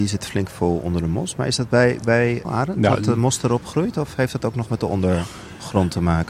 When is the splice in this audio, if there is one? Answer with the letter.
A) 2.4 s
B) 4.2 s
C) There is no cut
A